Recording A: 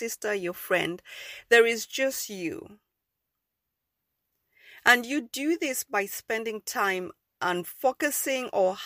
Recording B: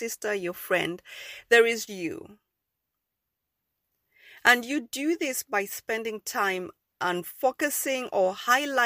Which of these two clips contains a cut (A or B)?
B